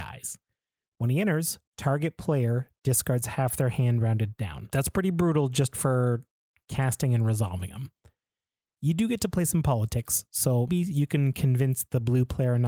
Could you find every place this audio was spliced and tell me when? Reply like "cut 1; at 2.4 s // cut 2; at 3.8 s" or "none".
cut 1; at 10.7 s